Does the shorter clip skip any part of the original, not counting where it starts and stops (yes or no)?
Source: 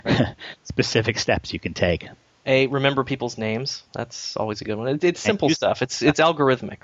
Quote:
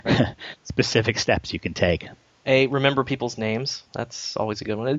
no